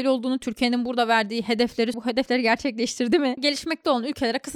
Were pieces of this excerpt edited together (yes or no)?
yes